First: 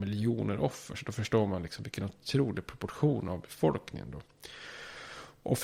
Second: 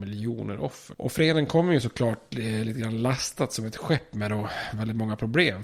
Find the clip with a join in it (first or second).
second